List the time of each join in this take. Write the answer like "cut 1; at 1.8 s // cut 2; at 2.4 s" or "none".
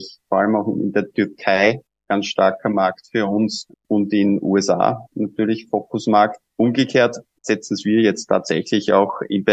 cut 1; at 6.5 s